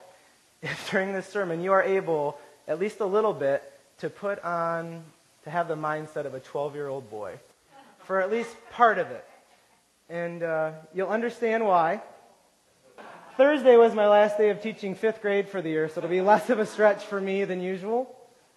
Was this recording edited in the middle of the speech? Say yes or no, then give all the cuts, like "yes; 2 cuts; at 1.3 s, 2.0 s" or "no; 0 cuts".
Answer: yes; 1 cut; at 13.0 s